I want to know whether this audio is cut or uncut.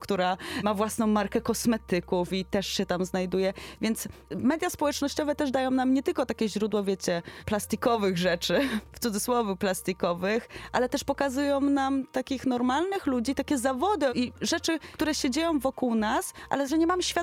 uncut